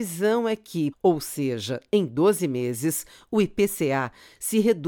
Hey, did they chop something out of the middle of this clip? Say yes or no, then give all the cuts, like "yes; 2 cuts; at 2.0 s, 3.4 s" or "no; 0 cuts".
yes; 1 cut; at 0.9 s